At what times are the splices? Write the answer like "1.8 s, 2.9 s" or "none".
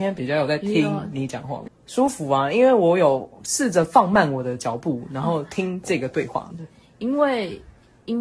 1.7 s, 6.5 s